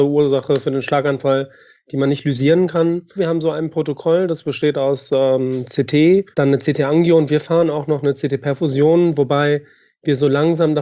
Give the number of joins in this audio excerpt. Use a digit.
2